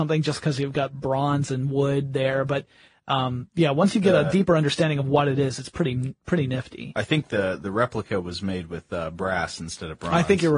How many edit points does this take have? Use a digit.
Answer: 0